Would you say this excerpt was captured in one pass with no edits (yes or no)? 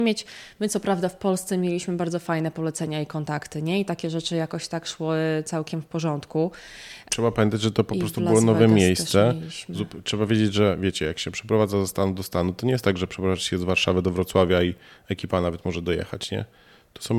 no